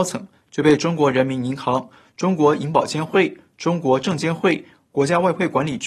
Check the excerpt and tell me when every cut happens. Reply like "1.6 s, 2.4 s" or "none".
none